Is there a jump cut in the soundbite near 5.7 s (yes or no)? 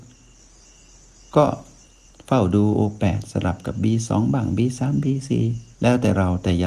yes